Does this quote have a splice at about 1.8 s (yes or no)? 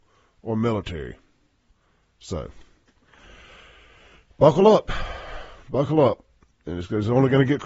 no